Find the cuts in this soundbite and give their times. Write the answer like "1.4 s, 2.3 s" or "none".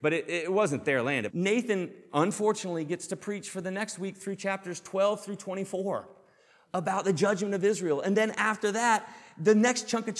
1.3 s